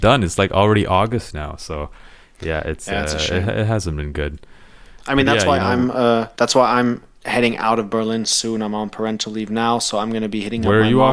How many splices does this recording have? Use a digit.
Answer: 1